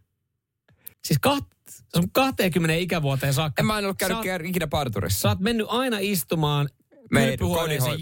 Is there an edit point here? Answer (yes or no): yes